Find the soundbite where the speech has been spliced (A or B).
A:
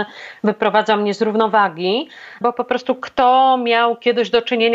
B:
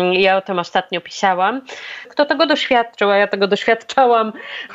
B